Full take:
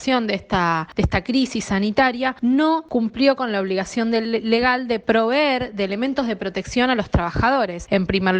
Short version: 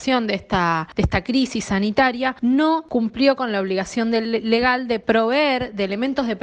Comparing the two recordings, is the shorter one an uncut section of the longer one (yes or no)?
yes